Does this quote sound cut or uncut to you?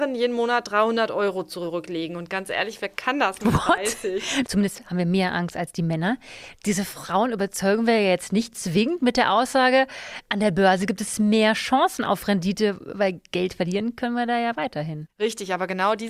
cut